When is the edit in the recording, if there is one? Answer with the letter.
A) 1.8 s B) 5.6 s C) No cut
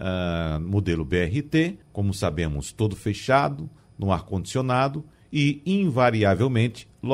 A